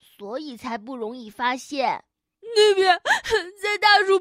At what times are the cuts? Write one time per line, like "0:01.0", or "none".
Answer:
0:02.3